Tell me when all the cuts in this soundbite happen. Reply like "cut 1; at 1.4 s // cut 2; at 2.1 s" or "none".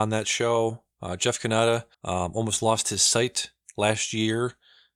cut 1; at 1.9 s